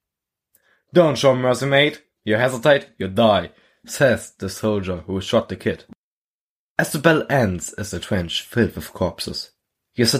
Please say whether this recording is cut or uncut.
uncut